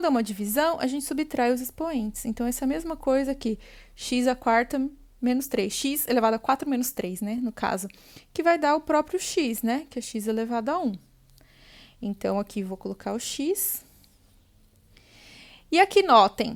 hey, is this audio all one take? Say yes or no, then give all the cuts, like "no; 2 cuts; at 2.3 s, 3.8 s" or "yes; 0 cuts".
yes; 0 cuts